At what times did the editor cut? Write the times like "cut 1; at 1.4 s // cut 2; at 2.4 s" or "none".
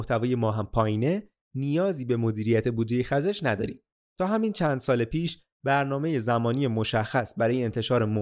cut 1; at 4.0 s